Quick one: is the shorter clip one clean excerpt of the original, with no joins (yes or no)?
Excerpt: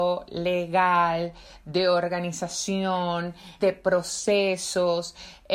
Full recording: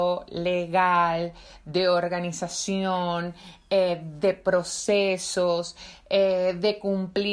no